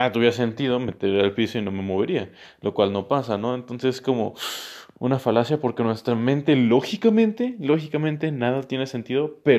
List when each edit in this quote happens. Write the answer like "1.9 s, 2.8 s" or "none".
none

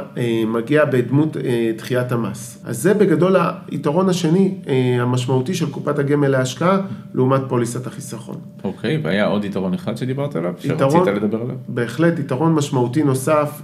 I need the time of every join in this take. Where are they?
2.6 s

